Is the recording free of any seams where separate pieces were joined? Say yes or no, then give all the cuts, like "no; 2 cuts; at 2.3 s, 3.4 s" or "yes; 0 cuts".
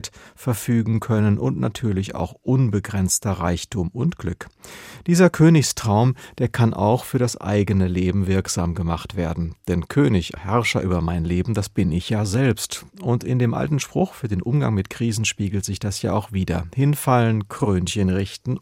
no; 1 cut; at 10.4 s